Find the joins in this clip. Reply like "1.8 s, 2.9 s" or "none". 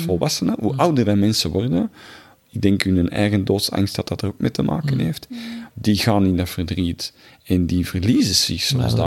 5.7 s